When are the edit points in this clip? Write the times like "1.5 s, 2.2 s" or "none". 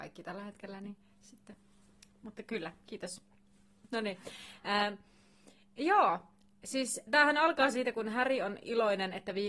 7.1 s